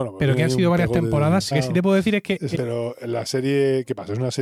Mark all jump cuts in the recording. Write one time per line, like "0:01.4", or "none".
0:01.5
0:02.5